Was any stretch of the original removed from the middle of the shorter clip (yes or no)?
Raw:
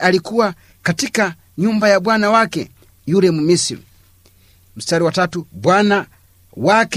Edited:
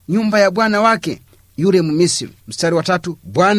yes